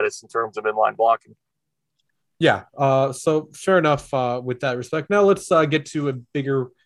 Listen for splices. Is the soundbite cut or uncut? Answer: uncut